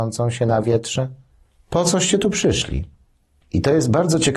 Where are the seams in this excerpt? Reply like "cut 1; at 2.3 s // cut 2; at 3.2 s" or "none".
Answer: none